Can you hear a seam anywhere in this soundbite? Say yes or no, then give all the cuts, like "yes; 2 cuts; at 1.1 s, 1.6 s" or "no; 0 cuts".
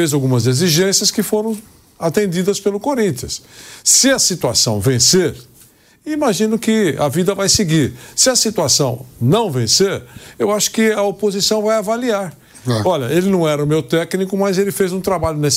no; 0 cuts